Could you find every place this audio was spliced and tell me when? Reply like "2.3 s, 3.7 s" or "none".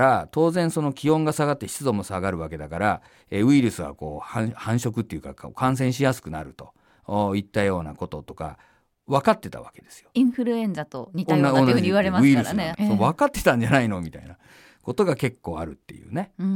12.7 s